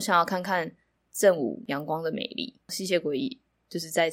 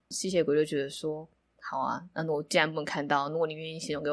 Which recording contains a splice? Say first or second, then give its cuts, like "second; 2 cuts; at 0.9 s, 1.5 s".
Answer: first; 1 cut; at 2.6 s